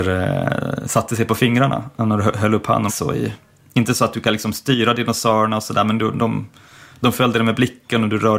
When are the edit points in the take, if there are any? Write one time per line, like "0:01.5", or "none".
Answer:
0:02.9